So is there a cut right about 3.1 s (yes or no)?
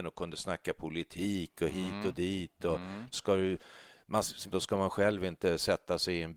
yes